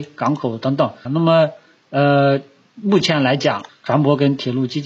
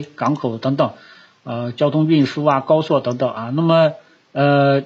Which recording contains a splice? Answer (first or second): first